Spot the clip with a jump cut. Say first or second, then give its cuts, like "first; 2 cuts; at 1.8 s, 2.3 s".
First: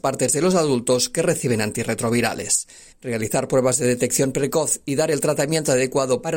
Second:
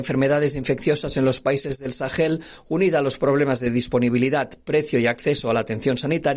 first; 1 cut; at 2.9 s